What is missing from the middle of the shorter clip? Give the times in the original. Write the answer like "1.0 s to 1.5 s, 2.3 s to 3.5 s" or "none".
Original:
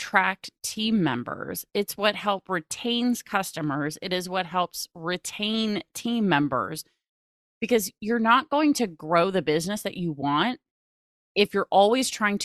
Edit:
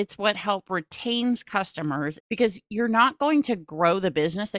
4.0 s to 7.5 s